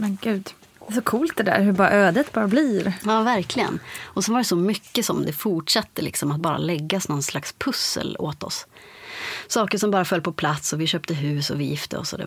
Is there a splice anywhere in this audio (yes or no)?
no